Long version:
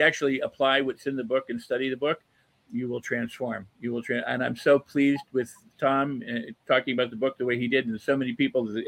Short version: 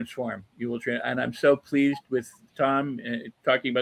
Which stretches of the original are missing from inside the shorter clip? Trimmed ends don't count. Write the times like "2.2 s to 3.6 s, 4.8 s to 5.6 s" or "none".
none